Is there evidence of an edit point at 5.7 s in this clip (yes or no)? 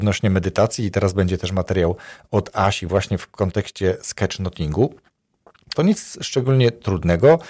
yes